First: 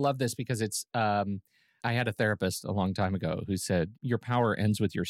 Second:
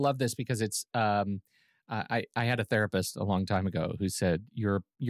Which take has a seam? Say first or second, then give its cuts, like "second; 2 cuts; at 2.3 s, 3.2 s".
first; 2 cuts; at 1.8 s, 3.9 s